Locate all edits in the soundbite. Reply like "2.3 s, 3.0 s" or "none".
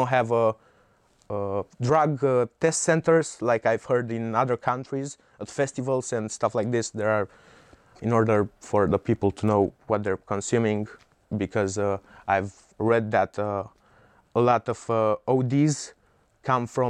8.0 s, 12.7 s